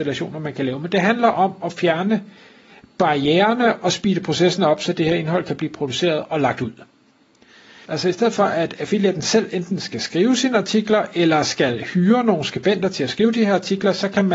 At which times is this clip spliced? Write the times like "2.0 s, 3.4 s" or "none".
7.9 s